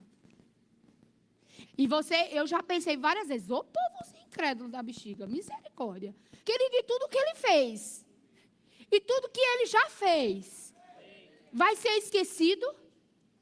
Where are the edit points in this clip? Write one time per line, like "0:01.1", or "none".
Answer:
0:01.6
0:06.4